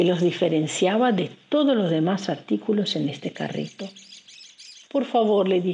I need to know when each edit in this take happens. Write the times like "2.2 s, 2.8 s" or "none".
4.8 s